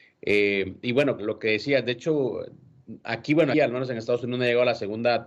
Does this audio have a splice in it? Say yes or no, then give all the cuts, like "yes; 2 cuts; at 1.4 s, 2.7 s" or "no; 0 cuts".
yes; 2 cuts; at 1.2 s, 3.5 s